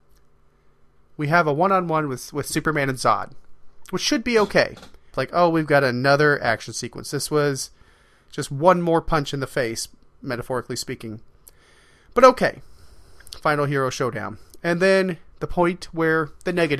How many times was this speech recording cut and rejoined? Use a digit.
1